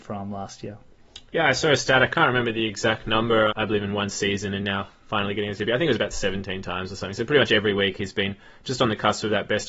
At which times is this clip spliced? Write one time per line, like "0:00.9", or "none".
0:01.3
0:03.5